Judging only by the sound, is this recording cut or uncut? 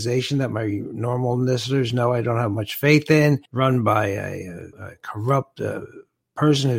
cut